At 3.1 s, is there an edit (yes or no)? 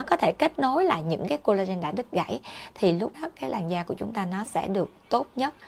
yes